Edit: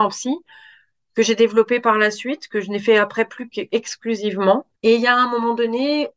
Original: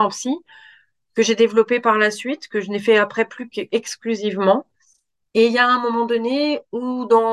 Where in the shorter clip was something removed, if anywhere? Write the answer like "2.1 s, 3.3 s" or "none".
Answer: 4.8 s

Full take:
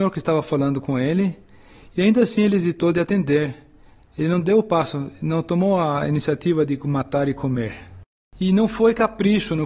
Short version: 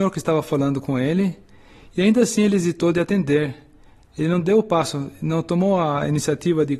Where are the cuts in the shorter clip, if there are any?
none

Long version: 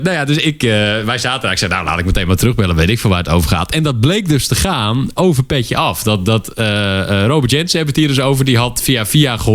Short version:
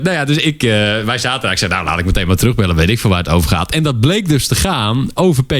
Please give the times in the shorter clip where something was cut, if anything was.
none

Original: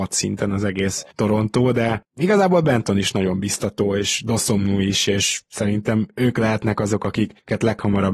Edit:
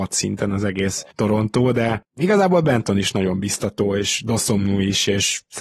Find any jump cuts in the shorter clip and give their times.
none

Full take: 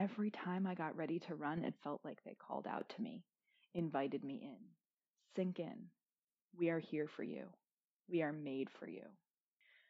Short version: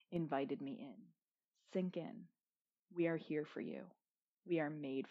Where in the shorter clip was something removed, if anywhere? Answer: none

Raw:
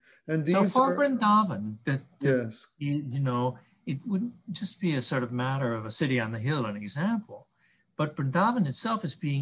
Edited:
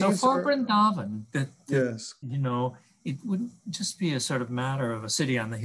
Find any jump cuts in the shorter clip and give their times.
2.2 s

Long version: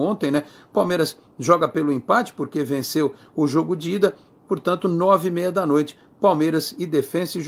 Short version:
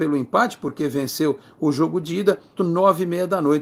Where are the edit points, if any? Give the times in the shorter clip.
2.6 s

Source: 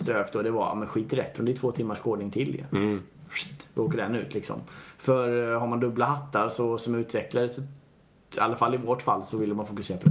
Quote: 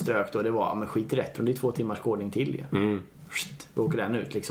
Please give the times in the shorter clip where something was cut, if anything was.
none

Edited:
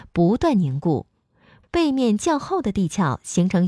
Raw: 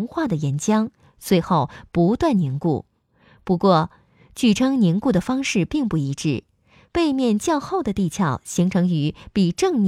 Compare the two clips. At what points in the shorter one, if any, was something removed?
1.6 s

